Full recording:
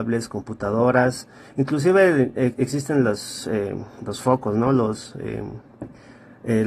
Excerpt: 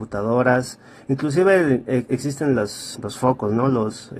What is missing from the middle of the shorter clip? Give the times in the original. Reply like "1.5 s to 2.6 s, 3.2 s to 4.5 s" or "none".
3.4 s to 4.0 s